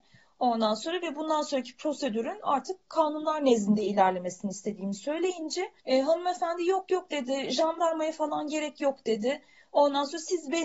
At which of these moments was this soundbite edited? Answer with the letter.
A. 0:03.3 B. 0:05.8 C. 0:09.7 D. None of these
B